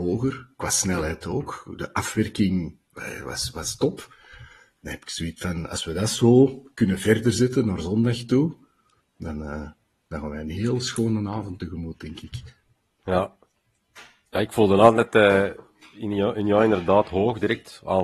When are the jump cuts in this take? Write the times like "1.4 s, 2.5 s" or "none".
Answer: none